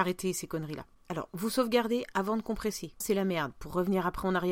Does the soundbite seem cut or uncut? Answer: cut